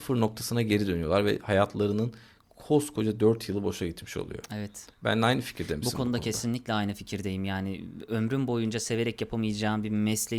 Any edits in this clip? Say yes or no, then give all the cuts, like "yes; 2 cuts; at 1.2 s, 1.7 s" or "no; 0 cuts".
no; 0 cuts